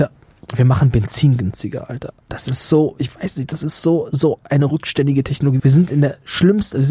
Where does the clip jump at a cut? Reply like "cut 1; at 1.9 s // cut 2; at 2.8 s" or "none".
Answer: cut 1; at 2.2 s // cut 2; at 5.6 s